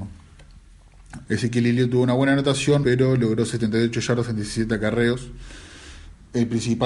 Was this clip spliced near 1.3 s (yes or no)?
yes